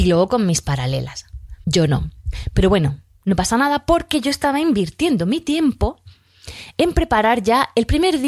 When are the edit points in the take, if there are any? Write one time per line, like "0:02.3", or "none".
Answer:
0:01.6